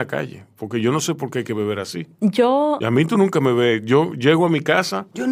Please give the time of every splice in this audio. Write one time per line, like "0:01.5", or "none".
none

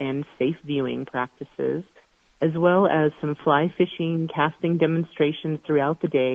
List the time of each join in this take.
none

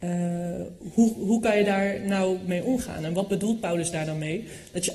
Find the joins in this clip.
none

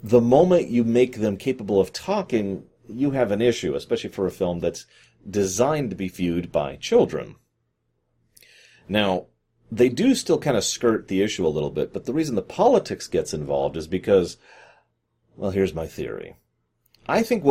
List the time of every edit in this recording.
none

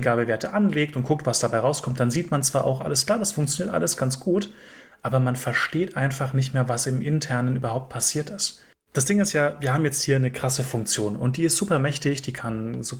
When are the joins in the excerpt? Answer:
0:08.7

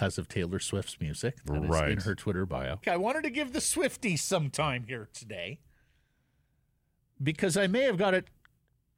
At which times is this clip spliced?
0:02.8

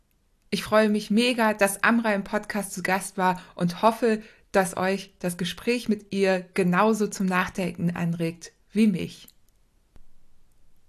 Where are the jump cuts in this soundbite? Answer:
none

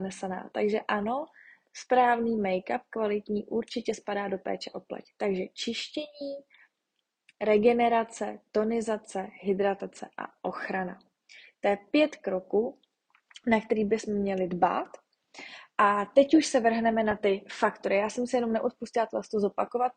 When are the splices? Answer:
none

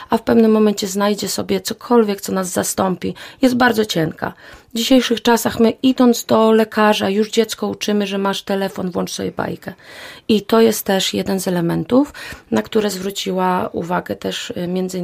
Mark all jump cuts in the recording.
none

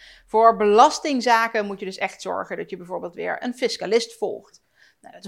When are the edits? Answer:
none

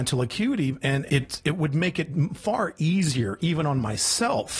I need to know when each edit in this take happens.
0:01.1

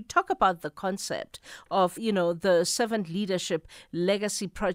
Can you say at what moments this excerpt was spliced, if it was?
0:02.0

